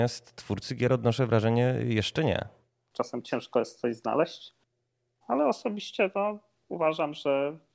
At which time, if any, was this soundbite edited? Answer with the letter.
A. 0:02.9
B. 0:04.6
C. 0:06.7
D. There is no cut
A